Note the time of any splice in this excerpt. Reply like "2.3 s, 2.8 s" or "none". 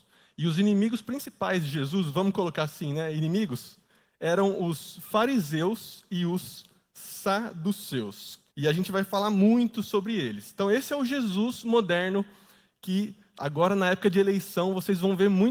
8.5 s